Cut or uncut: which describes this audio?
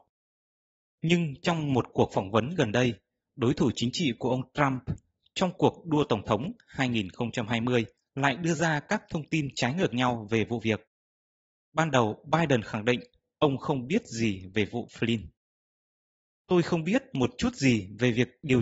cut